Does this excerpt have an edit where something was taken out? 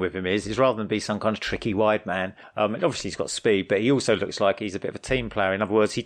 no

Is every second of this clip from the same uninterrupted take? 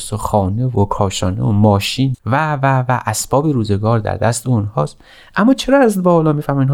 no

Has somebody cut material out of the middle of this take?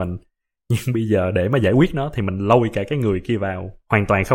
no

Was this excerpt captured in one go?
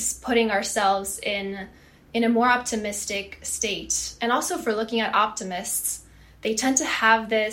yes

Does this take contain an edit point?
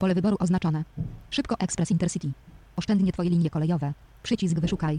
yes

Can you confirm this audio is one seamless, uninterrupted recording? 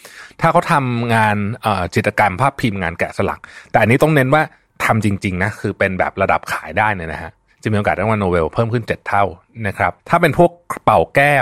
no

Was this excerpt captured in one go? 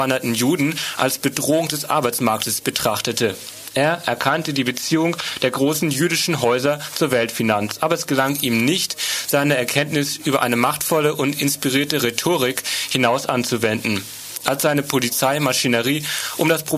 yes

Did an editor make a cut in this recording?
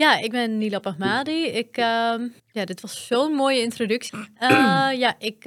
yes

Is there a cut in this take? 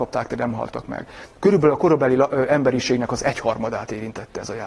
no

